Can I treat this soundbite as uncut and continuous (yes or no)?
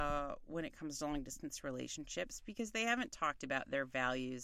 yes